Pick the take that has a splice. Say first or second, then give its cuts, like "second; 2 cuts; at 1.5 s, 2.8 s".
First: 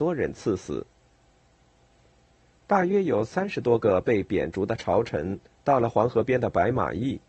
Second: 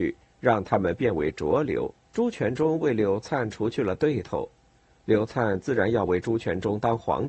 second; 1 cut; at 2.0 s